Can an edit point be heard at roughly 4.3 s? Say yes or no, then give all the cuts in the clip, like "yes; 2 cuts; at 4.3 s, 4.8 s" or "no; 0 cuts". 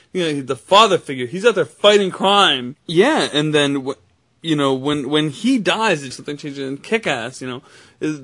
no; 2 cuts; at 2.7 s, 6.1 s